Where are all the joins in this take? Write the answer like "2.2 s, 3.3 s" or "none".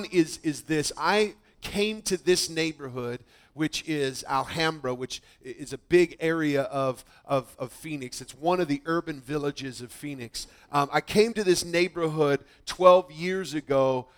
none